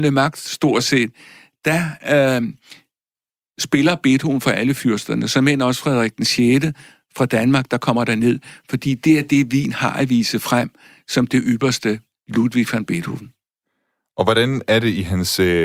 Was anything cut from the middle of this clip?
no; 0 cuts

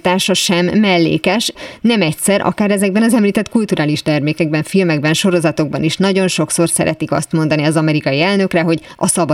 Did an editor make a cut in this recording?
no; 0 cuts

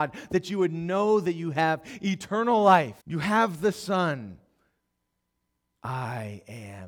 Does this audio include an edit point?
yes; 2 cuts; at 3.0 s, 5.8 s

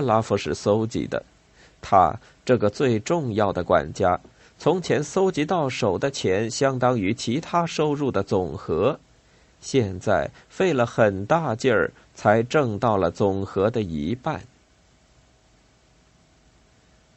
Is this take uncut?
yes; 0 cuts

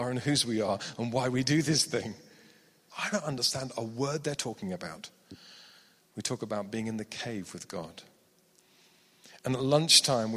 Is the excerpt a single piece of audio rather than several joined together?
no; 2 cuts; at 2.9 s, 6.0 s

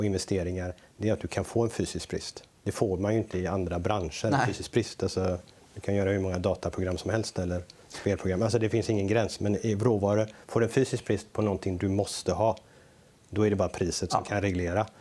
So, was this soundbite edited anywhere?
no; 0 cuts

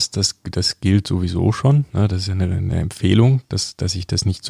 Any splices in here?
no; 0 cuts

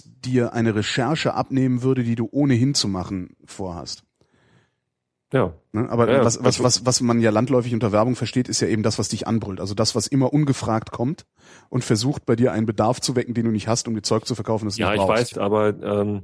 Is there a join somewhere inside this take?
yes; 1 cut; at 15.3 s

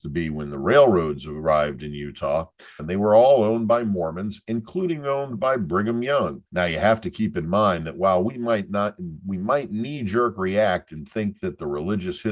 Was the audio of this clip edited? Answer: yes; 2 cuts; at 2.8 s, 6.5 s

